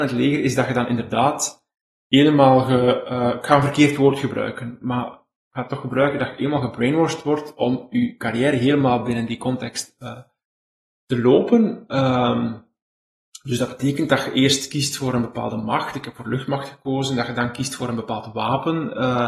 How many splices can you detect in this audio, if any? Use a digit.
0